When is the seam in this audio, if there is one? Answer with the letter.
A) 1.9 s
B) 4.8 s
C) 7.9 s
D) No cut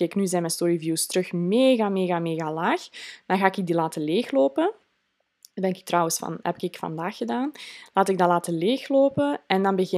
D